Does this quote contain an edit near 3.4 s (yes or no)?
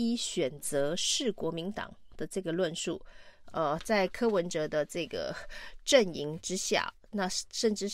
yes